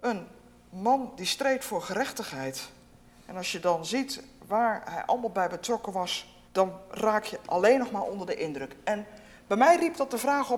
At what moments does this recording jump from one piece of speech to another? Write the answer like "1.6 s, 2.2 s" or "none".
6.5 s